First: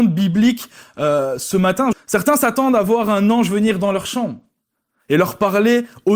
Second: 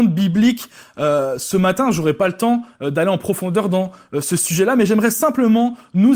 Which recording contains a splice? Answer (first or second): first